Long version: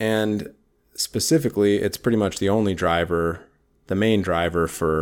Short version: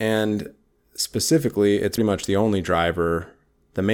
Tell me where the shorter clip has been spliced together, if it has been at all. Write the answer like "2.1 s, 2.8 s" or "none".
2.0 s